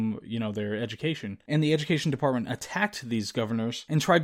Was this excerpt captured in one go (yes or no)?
yes